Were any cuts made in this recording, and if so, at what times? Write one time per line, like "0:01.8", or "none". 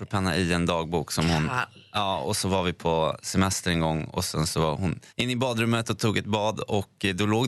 0:05.1